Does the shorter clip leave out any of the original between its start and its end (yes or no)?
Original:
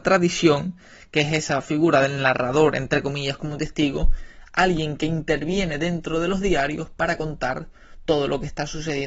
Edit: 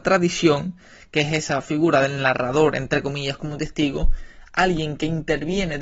no